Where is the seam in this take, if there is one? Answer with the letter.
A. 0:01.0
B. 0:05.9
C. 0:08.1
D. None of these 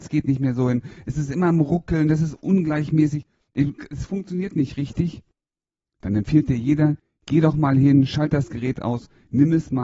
D